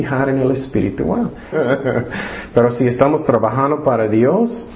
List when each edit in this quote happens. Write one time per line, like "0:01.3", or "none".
0:01.5

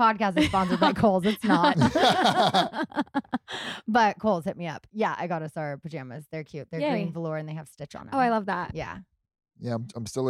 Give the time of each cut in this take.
none

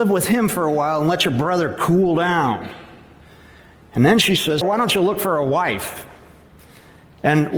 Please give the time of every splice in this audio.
0:04.6

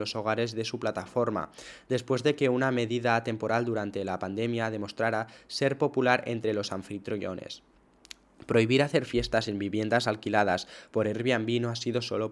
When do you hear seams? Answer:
none

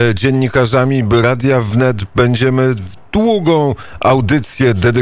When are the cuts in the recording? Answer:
none

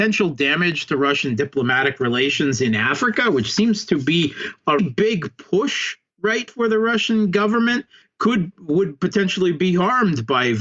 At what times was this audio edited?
0:04.8
0:06.5

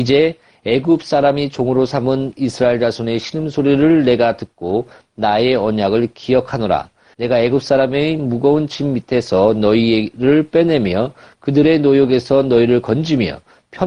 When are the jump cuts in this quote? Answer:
0:07.1

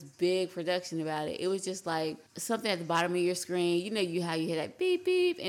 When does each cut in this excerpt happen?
0:02.3

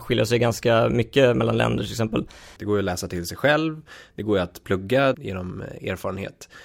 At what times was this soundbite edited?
0:02.6
0:05.1

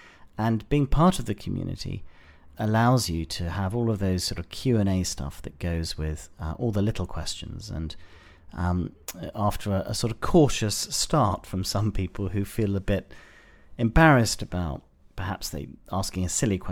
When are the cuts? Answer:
0:02.5

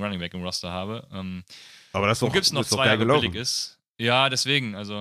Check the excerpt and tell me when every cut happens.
none

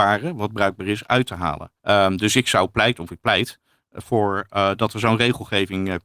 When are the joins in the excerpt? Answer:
0:01.8

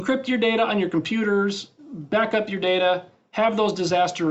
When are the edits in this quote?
none

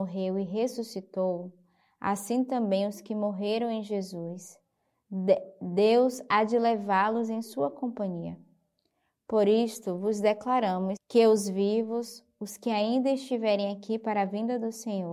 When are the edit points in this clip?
0:11.0

